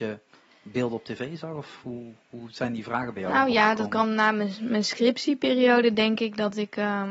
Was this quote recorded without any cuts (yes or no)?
yes